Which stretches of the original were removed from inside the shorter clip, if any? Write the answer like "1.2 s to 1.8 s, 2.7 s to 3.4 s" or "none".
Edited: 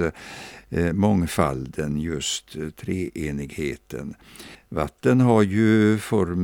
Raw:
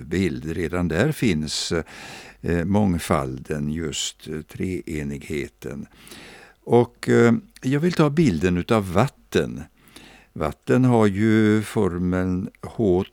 6.3 s to 10.2 s